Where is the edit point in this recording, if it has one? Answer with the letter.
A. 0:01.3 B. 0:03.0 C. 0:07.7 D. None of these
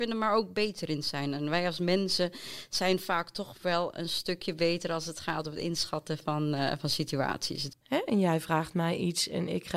C